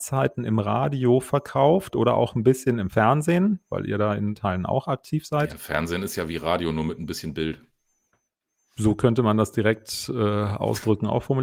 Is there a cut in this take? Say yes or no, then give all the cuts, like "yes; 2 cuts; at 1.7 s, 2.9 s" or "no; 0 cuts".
no; 0 cuts